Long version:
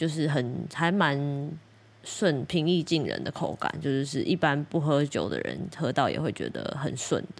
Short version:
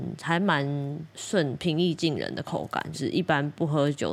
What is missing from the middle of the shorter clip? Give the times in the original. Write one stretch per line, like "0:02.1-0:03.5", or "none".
0:01.6-0:02.0
0:03.8-0:04.1